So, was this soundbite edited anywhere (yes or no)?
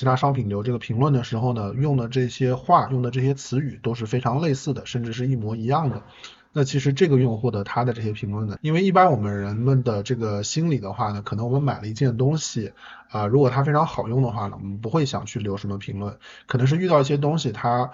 yes